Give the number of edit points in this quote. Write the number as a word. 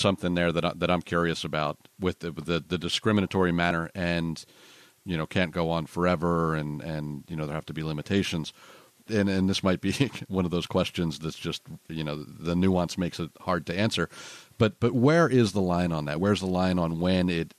one